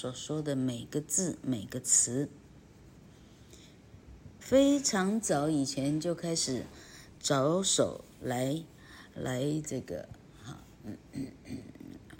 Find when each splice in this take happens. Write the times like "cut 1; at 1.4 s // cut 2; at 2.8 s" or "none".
cut 1; at 4.4 s